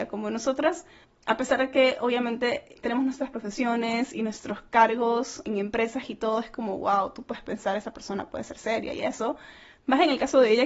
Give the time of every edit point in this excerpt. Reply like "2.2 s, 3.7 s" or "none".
none